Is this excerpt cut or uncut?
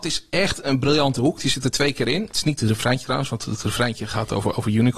uncut